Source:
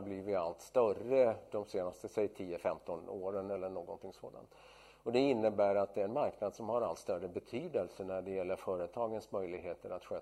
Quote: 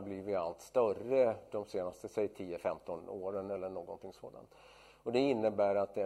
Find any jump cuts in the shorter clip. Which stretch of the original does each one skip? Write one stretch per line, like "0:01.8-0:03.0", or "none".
none